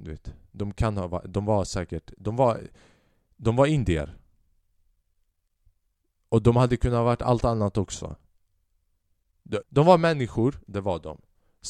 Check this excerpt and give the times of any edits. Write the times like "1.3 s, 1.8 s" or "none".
9.6 s